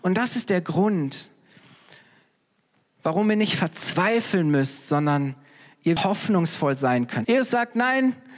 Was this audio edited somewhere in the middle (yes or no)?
yes